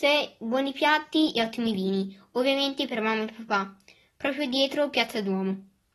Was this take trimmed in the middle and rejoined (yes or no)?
no